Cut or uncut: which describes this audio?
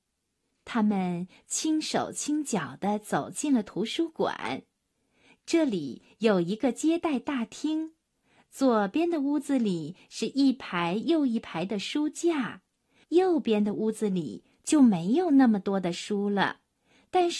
cut